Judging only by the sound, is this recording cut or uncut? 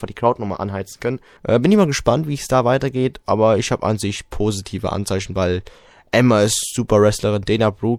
cut